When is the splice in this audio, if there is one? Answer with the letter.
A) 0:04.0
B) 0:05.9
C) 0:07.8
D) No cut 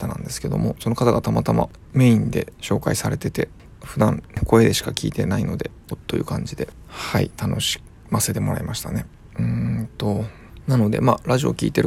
B